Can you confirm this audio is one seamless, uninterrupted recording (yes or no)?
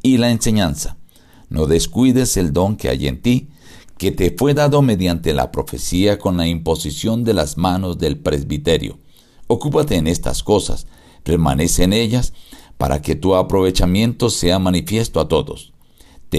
yes